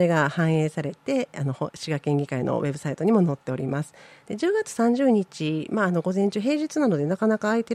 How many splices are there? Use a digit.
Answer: 1